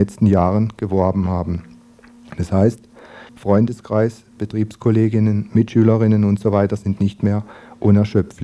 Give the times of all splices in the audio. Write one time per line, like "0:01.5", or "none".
0:03.3